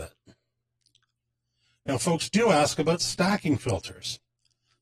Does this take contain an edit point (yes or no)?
no